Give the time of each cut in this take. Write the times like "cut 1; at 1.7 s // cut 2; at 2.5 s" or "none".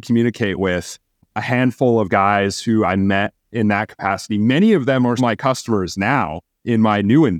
cut 1; at 5.2 s